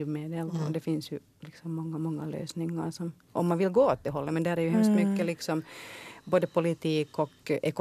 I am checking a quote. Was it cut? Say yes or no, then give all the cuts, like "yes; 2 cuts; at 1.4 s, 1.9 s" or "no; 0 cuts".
no; 0 cuts